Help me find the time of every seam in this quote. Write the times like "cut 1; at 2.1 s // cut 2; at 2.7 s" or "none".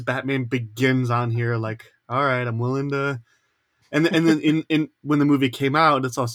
none